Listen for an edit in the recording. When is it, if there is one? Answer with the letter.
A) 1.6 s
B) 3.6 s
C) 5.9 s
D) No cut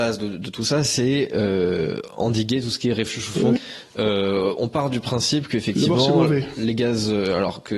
B